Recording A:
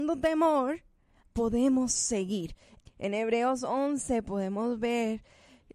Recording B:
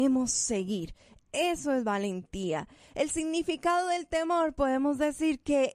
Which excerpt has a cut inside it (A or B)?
A